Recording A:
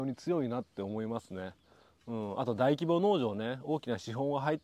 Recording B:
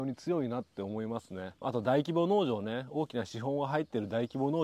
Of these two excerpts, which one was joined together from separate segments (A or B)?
B